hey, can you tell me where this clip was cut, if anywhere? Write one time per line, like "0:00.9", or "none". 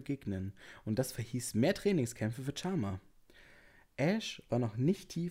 none

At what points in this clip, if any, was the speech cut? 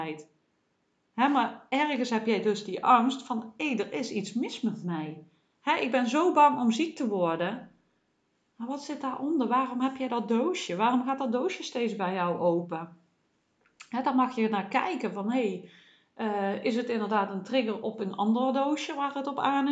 none

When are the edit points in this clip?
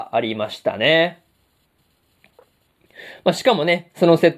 none

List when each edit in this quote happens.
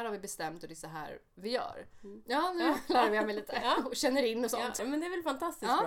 0:02.2
0:04.8

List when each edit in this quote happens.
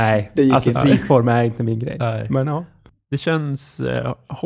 none

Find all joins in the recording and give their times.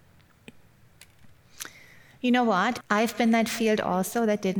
0:02.8

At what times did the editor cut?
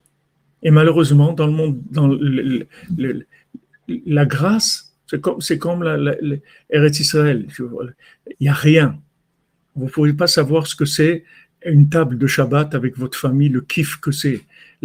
0:08.3

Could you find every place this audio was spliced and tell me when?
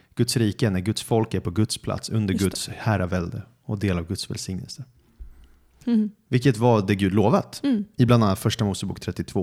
0:05.8

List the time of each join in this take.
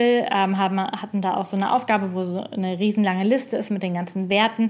none

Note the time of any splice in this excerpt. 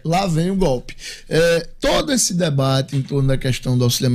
none

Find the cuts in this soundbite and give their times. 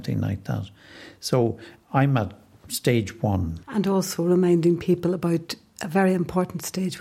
0:03.6

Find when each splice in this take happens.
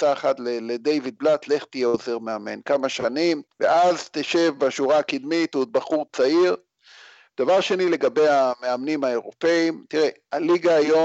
0:03.5

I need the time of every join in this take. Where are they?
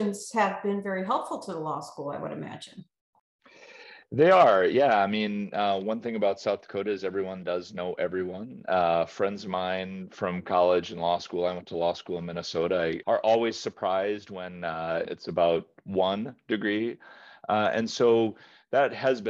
0:13.0
0:15.0

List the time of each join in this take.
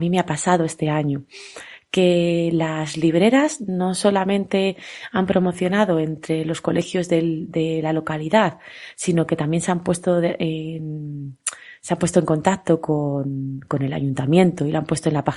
none

